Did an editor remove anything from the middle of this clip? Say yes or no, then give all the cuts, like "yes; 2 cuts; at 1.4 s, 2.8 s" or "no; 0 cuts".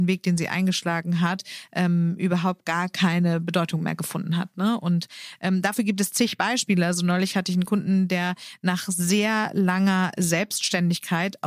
no; 0 cuts